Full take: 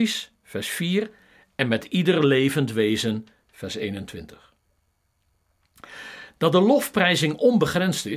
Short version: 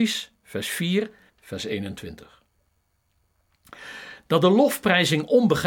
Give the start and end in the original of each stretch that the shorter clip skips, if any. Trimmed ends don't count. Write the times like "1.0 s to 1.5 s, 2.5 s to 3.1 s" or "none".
1.3 s to 3.4 s